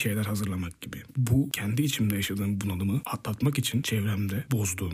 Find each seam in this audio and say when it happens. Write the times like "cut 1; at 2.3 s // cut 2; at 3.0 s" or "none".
cut 1; at 1.1 s

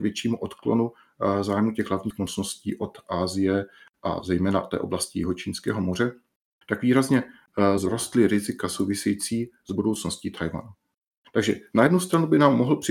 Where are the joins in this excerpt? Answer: cut 1; at 6.6 s

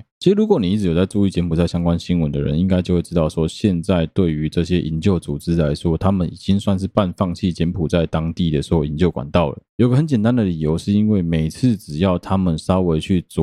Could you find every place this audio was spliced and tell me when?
none

